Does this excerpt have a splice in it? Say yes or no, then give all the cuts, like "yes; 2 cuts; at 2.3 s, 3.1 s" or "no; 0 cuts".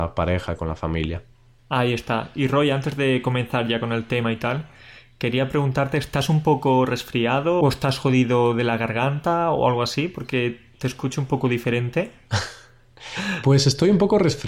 no; 0 cuts